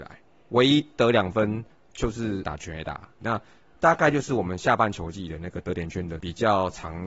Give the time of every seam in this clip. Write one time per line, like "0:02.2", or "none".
0:03.2